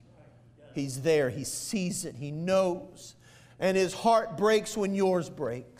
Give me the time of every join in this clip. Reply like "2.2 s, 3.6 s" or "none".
none